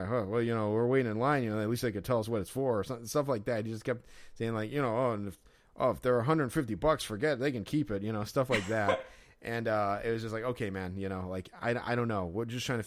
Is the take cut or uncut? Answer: uncut